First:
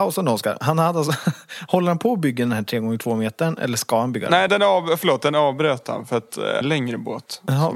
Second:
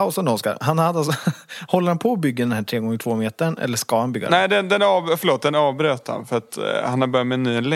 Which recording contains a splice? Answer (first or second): first